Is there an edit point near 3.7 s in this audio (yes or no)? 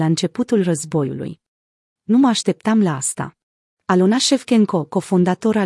yes